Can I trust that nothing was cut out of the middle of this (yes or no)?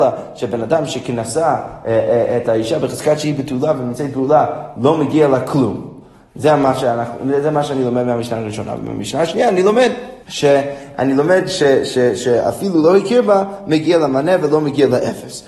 no